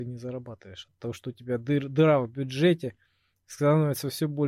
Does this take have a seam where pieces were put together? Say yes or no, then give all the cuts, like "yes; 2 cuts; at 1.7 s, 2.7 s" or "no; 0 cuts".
no; 0 cuts